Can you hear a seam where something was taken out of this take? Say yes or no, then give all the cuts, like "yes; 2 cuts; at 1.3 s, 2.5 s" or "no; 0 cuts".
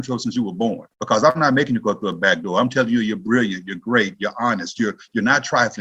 yes; 1 cut; at 0.9 s